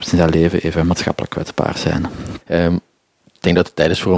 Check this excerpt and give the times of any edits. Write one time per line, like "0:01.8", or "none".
0:02.4